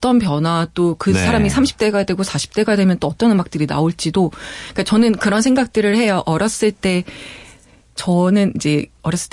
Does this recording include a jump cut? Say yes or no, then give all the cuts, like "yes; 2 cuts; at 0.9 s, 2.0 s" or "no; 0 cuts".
no; 0 cuts